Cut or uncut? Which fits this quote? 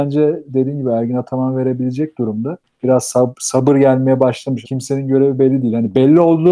cut